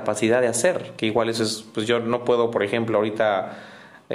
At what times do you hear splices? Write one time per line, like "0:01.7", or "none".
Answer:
none